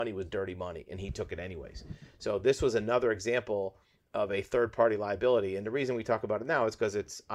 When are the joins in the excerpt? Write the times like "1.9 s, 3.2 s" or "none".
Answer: none

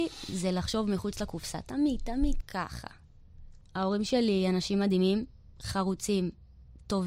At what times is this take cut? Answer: 2.4 s, 3.6 s

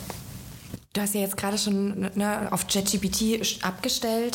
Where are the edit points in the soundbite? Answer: none

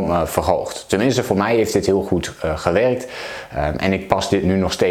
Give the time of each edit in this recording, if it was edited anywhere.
none

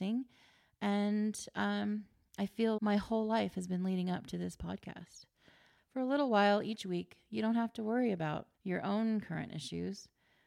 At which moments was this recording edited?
2.8 s, 5.8 s, 8.5 s

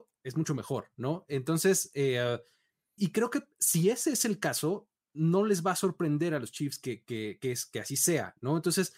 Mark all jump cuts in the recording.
3.0 s

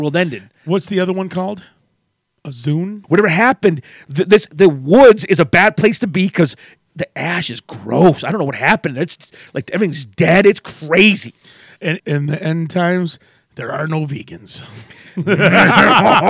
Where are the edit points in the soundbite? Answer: 3.0 s, 12.0 s

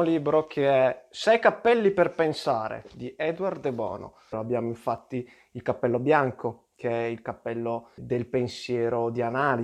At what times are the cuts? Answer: 4.3 s, 8.0 s

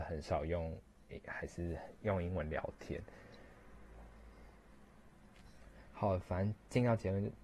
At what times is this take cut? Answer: none

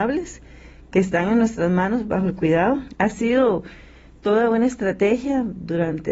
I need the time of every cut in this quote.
2.9 s

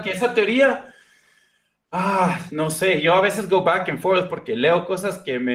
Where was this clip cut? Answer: none

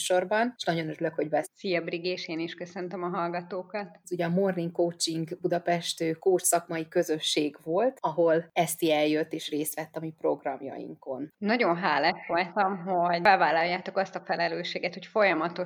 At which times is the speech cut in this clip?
1.4 s, 4.0 s, 11.3 s

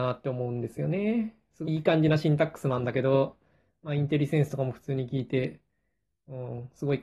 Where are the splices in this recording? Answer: 1.7 s

